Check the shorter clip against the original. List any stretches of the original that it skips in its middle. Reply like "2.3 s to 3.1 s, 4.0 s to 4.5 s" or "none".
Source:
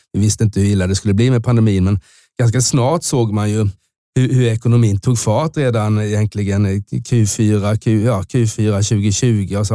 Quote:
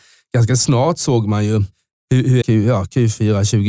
4.5 s to 7.8 s